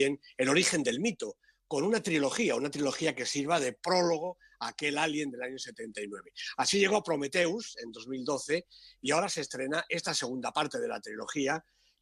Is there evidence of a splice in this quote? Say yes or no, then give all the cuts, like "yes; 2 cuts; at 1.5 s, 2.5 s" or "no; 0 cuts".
no; 0 cuts